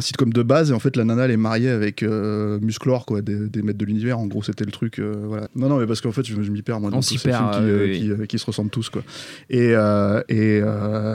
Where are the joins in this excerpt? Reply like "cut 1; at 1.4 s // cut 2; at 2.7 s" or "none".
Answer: cut 1; at 5.5 s